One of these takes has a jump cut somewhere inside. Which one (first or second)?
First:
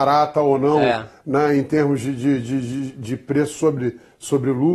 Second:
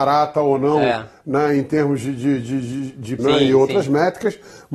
second